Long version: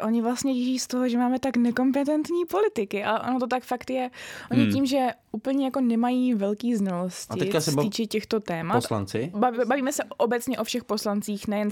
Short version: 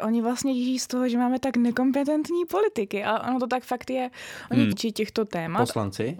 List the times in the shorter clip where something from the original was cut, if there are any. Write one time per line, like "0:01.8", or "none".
0:04.7